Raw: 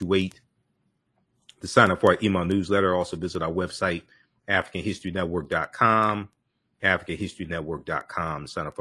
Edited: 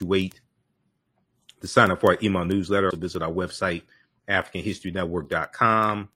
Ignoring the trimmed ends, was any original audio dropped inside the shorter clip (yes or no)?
yes